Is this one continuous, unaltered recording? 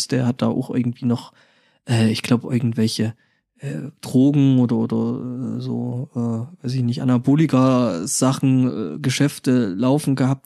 yes; 0 cuts

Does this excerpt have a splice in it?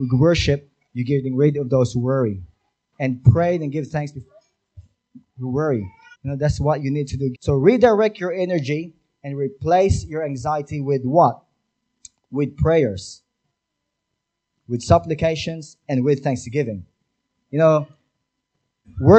yes; 2 cuts; at 6.1 s, 7.3 s

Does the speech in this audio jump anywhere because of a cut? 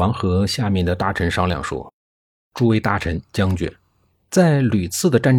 yes; 1 cut; at 4.2 s

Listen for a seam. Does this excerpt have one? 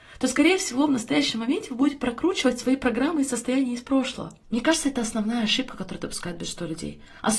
yes; 1 cut; at 4.4 s

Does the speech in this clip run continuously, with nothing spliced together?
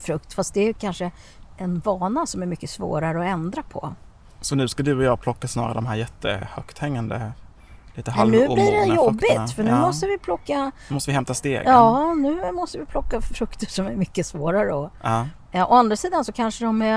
no; 1 cut; at 15.5 s

